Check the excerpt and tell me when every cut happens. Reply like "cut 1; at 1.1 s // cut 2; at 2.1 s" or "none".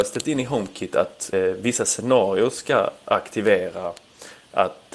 cut 1; at 1.3 s